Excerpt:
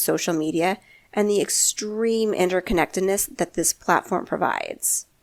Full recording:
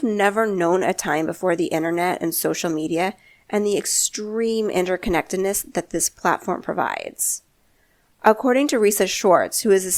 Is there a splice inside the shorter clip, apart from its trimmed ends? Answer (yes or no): no